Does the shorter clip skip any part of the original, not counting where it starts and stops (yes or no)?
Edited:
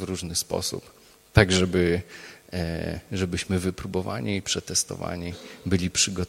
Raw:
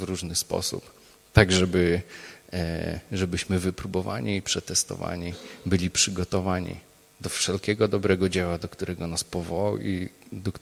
no